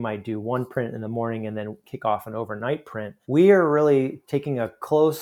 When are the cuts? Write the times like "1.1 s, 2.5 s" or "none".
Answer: 3.2 s